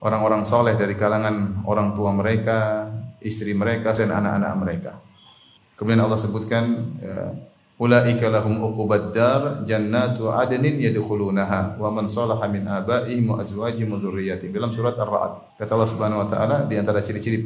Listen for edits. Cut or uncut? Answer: cut